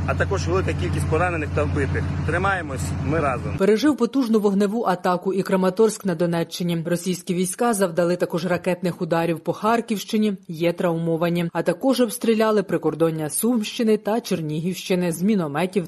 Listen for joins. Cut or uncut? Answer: uncut